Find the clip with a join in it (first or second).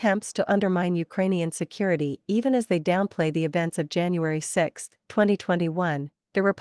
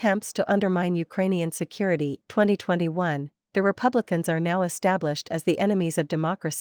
second